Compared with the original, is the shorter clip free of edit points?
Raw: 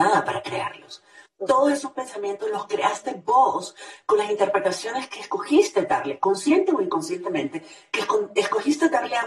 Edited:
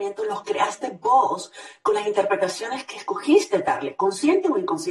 yes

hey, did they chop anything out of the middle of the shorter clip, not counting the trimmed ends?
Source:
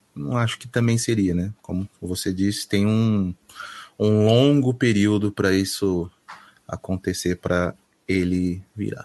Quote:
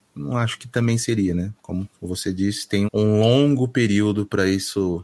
yes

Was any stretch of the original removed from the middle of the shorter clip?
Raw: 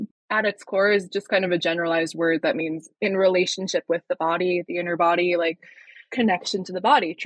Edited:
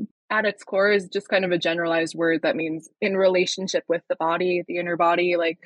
no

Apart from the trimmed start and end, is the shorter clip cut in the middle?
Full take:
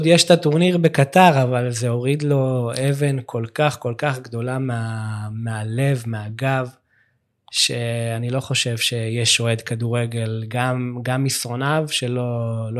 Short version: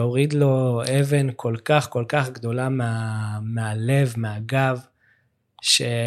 no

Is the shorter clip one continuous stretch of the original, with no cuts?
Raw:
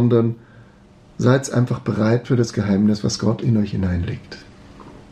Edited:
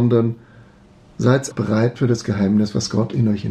no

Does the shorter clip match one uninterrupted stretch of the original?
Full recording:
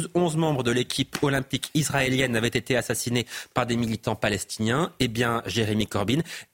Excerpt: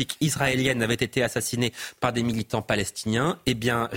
yes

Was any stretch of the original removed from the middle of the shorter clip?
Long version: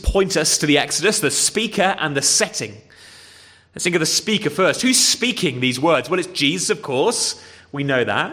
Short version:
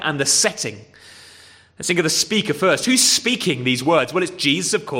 no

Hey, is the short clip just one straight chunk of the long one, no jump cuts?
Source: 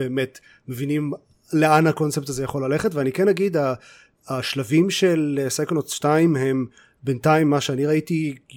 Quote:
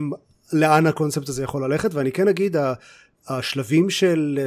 yes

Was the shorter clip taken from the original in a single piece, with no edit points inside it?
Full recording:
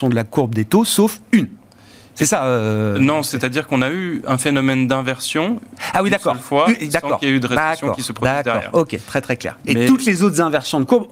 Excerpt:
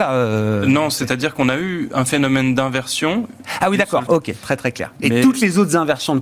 no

